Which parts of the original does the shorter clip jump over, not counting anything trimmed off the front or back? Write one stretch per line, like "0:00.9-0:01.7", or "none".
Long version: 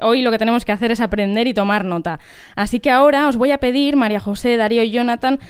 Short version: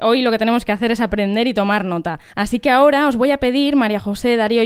0:02.3-0:02.5